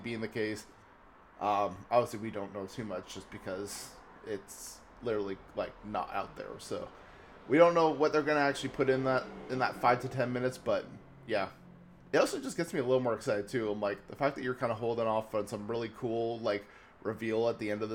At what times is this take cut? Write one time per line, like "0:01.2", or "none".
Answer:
none